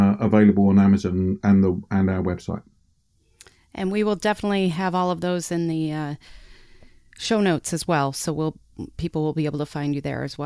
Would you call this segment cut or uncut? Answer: uncut